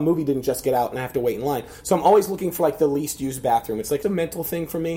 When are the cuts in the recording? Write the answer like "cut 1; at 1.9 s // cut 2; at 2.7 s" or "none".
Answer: cut 1; at 4.0 s